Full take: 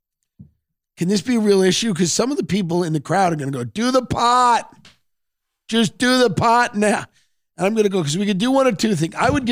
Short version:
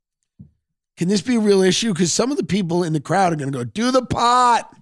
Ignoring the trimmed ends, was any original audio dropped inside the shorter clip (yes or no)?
no